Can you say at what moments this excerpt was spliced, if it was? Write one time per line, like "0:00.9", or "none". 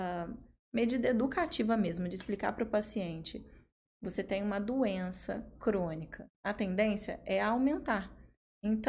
0:03.9
0:06.3